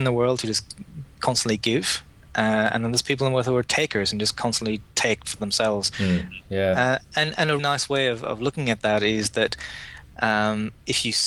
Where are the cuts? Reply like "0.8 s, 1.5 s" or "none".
6.4 s, 7.6 s